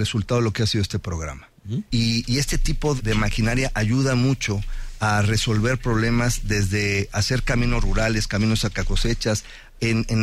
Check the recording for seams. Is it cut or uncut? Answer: cut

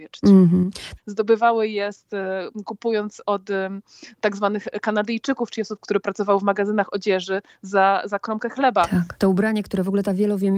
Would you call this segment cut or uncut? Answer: cut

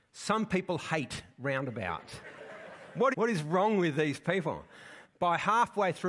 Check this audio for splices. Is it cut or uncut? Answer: cut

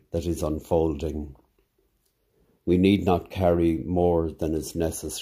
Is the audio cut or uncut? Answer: cut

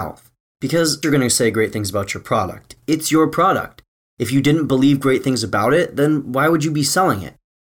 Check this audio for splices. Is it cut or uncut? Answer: cut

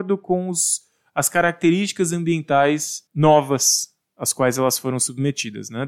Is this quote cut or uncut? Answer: cut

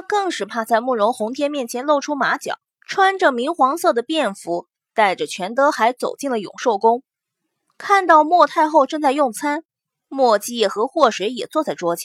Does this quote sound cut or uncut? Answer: cut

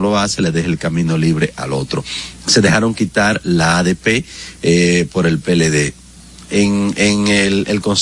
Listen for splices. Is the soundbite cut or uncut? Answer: uncut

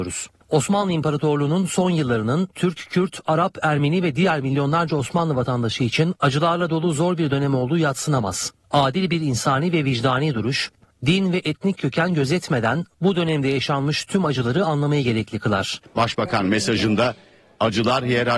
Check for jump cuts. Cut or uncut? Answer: uncut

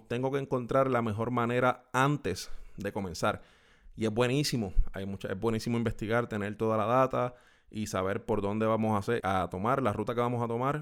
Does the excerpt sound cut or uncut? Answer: cut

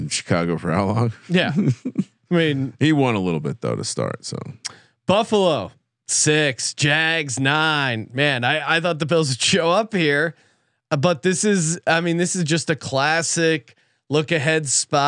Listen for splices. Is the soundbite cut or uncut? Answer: uncut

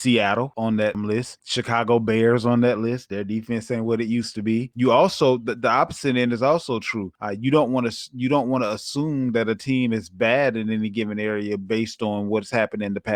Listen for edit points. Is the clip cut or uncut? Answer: uncut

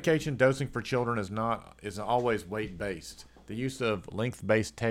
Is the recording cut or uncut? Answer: uncut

